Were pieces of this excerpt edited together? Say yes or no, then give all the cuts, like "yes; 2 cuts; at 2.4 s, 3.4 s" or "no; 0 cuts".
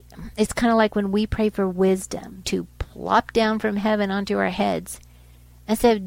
yes; 1 cut; at 2.4 s